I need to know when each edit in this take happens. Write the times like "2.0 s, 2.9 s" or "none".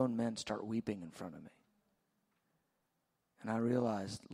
none